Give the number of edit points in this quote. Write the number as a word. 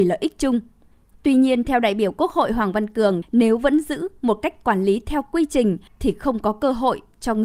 two